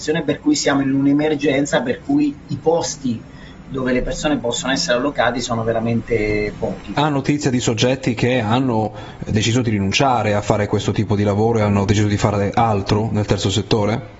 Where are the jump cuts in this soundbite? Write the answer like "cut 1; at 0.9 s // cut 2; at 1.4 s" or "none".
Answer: cut 1; at 6.9 s